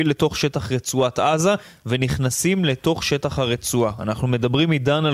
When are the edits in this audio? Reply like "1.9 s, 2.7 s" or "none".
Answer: none